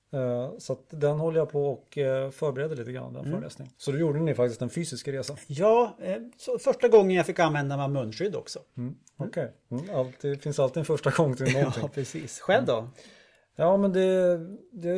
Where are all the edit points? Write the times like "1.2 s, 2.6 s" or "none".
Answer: 3.7 s